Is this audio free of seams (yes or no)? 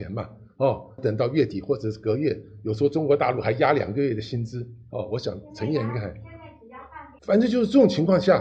no